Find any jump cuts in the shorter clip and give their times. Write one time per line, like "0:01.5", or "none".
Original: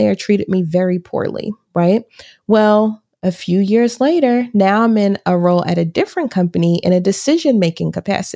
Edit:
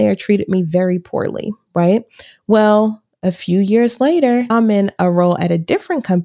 0:04.5